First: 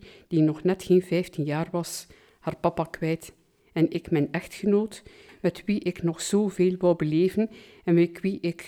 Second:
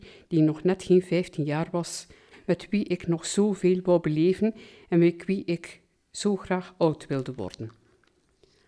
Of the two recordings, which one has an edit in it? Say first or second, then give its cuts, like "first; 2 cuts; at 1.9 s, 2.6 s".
second; 1 cut; at 2.3 s